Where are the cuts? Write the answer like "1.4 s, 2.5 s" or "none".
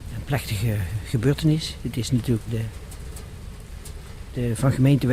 2.5 s